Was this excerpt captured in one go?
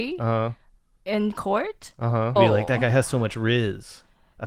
no; 1 cut; at 2.4 s

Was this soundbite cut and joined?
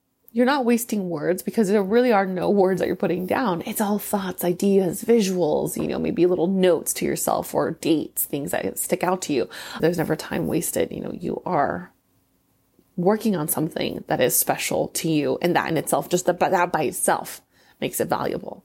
yes; 1 cut; at 9.8 s

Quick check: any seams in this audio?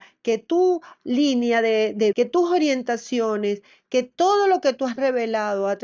yes; 1 cut; at 2.1 s

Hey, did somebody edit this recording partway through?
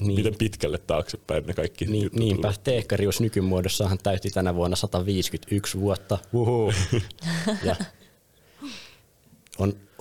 no; 0 cuts

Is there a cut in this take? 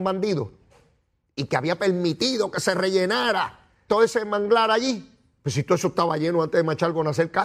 yes; 1 cut; at 3.9 s

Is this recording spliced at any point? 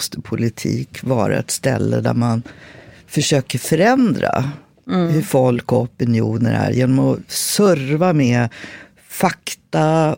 no; 0 cuts

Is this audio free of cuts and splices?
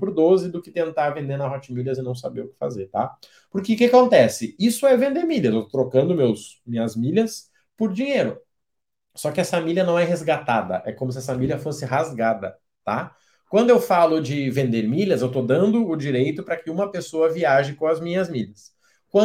yes; 0 cuts

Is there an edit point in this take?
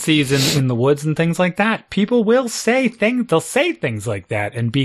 no; 0 cuts

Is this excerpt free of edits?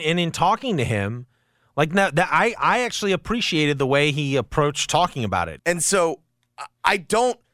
no; 1 cut; at 5.6 s

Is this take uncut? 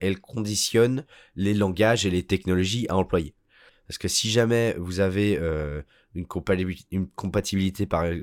no; 1 cut; at 3.7 s

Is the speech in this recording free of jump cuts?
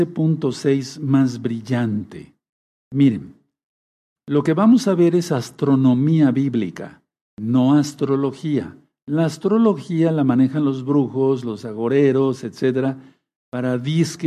no; 2 cuts; at 2.7 s, 11.4 s

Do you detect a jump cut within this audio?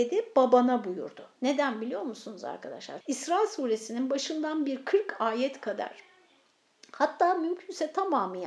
yes; 2 cuts; at 1.3 s, 3.0 s

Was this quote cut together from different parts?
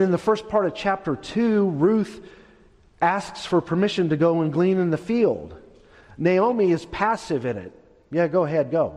no; 0 cuts

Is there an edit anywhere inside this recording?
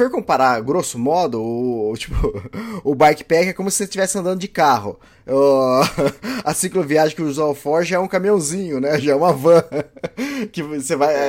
no; 0 cuts

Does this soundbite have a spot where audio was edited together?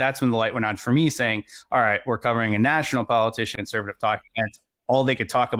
yes; 1 cut; at 3.6 s

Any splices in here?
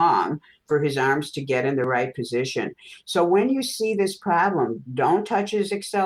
yes; 1 cut; at 4.8 s

